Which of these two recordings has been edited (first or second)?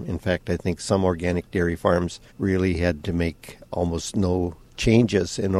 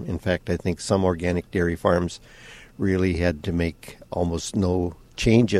first